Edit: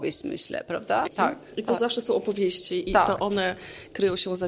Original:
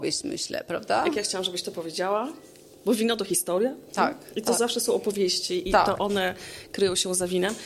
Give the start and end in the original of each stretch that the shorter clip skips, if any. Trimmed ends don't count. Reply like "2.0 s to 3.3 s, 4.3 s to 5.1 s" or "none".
1.0 s to 3.8 s

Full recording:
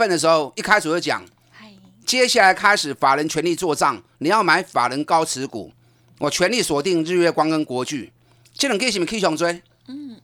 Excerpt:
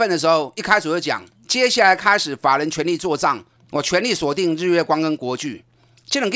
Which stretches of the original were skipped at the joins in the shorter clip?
1.3 s to 1.9 s, 4.1 s to 6.0 s

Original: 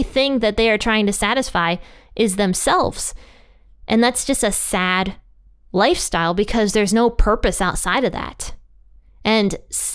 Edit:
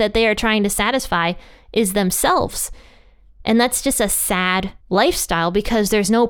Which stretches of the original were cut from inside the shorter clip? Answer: 5.2 s to 5.6 s

